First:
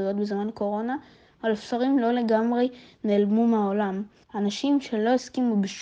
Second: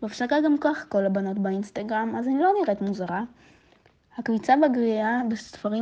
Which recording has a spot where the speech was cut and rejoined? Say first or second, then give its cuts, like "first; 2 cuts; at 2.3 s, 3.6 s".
first; 1 cut; at 4.2 s